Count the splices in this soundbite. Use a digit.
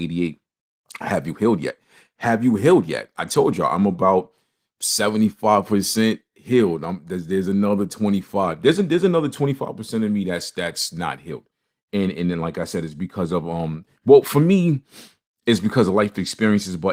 0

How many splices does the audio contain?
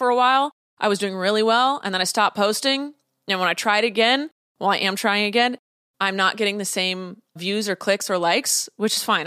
1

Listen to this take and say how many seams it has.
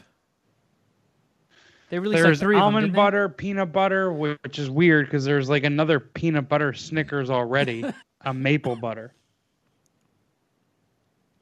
1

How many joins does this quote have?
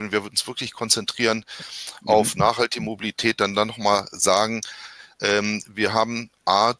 0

